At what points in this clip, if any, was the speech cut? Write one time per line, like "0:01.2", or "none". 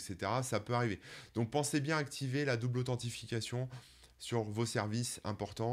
none